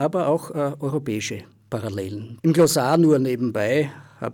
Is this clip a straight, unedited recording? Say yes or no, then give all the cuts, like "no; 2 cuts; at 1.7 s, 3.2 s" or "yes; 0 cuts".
no; 1 cut; at 2.4 s